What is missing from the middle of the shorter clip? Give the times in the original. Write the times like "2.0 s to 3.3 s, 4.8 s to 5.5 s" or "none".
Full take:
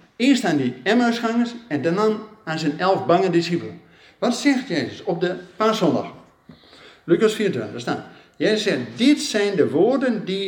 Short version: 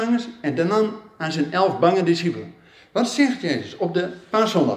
none